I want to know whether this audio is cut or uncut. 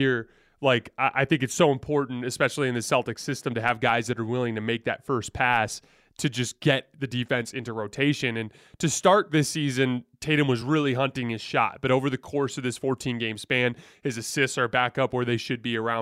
uncut